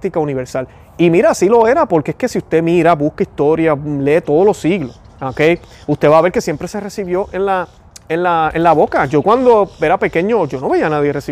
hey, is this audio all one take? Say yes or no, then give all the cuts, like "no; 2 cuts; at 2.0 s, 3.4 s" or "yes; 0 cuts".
no; 1 cut; at 5.1 s